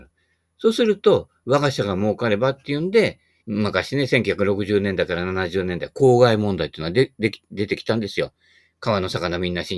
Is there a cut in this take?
yes; 1 cut; at 3.4 s

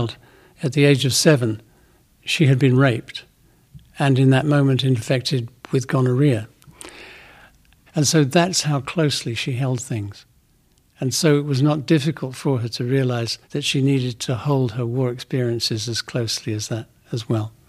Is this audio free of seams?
no; 2 cuts; at 7.9 s, 13.4 s

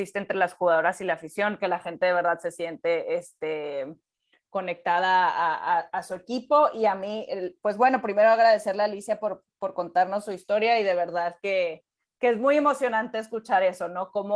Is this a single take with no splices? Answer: yes; 0 cuts

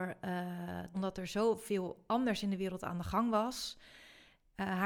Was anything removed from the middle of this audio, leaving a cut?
yes; 1 cut; at 0.9 s

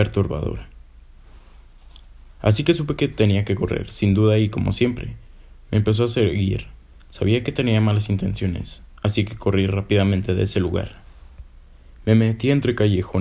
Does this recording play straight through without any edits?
yes; 0 cuts

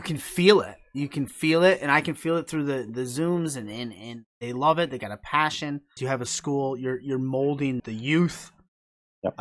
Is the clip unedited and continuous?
no; 2 cuts; at 6.0 s, 7.8 s

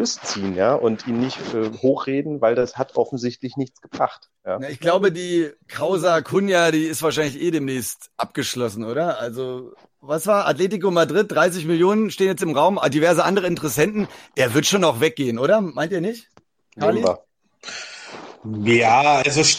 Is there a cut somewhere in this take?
no; 0 cuts

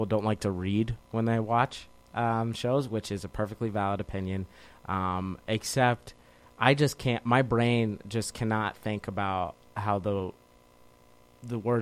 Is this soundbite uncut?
yes; 0 cuts

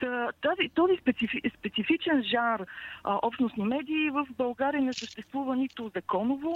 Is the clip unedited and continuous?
yes; 0 cuts

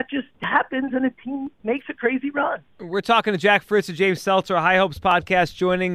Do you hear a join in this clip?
no; 0 cuts

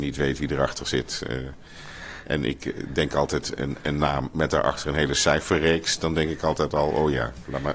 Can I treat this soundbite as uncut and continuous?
yes; 0 cuts

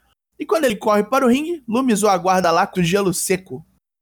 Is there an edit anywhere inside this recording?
yes; 1 cut; at 2.7 s

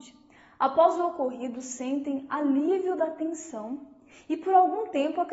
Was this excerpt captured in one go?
yes; 0 cuts

